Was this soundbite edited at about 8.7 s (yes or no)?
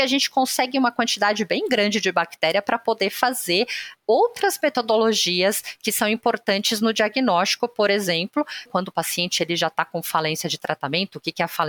yes